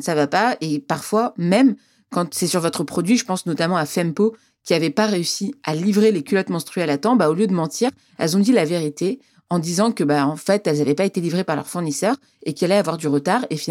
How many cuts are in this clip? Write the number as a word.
zero